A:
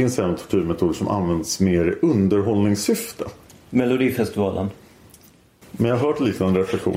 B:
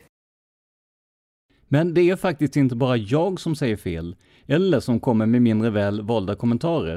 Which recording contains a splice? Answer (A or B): A